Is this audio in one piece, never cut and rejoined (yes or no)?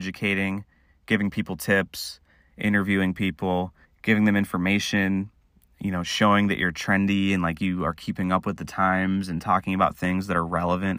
no